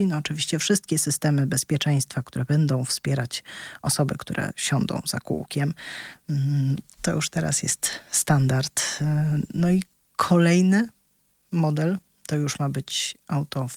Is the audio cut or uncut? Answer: uncut